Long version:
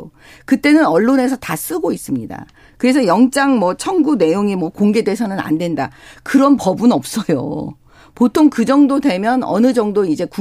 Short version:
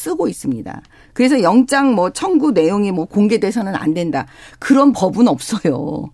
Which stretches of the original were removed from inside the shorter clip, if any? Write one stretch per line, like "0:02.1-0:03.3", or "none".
none

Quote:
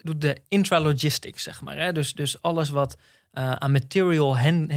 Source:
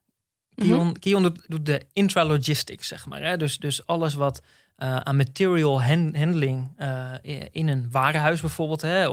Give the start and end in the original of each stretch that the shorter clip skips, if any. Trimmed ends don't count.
none

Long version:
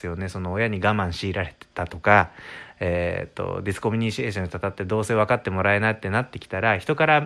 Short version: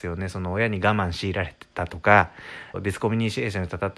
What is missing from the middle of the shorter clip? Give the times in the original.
0:02.7-0:03.6

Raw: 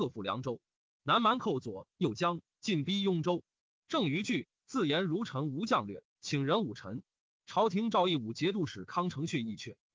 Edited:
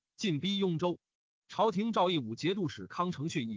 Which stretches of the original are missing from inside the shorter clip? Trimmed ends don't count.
0:03.8-0:07.3

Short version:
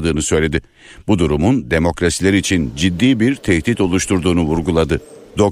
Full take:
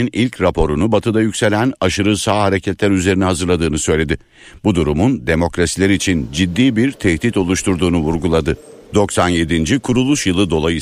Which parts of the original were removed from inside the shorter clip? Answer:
none

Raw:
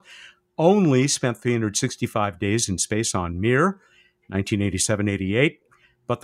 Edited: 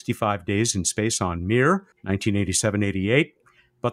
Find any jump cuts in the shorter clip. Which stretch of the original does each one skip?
0:03.9-0:04.2

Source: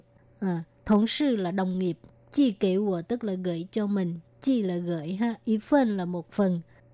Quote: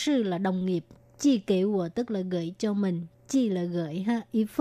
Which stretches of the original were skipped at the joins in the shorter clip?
none

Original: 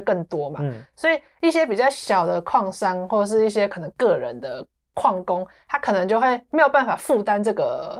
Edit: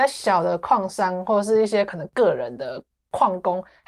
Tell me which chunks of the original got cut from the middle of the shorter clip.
none

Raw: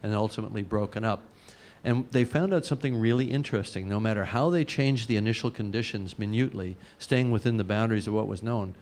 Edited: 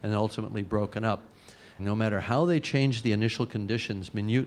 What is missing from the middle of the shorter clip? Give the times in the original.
0:01.8-0:03.8

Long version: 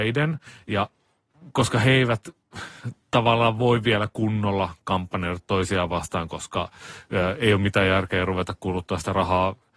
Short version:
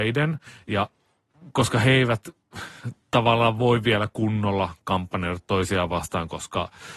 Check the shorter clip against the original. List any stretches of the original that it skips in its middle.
none

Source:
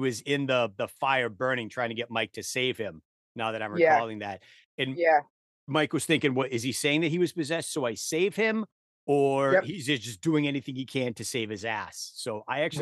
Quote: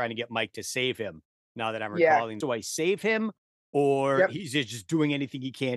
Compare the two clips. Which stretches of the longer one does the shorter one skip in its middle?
0:04.2-0:07.7

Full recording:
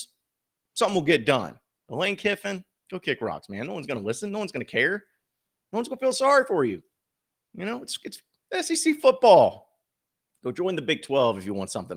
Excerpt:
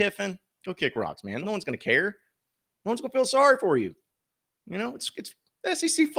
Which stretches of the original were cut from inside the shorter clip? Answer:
0:03.7-0:04.3

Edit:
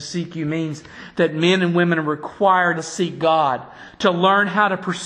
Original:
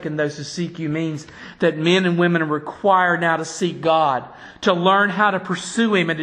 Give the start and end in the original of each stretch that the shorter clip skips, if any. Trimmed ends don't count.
0:03.2-0:03.4

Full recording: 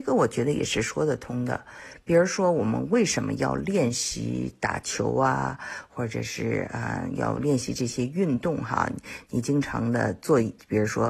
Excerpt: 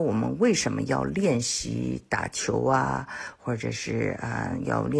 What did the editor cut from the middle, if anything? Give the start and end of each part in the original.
none

